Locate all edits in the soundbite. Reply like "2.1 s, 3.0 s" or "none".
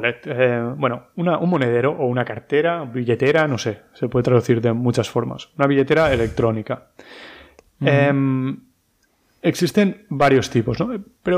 none